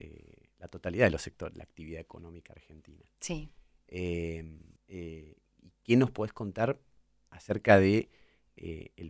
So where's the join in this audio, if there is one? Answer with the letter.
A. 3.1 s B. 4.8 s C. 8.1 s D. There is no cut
B